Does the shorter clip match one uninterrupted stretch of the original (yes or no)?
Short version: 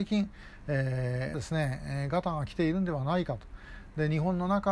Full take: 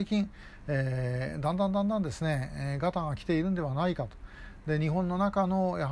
no